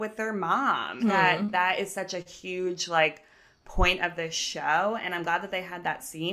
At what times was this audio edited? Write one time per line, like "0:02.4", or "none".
0:01.0